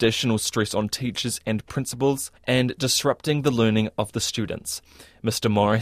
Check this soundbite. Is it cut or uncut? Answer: cut